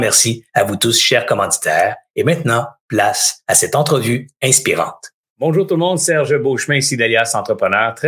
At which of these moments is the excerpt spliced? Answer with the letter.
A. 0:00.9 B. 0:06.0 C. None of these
C